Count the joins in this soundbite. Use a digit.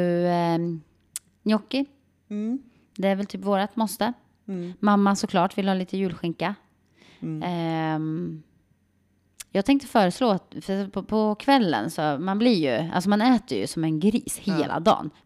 0